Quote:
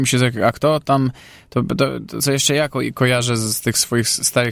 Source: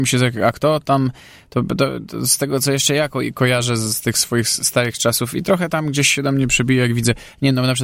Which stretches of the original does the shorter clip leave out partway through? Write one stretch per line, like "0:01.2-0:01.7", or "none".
0:02.2-0:02.6